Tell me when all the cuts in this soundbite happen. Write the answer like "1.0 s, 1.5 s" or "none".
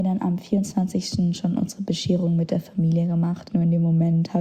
3.5 s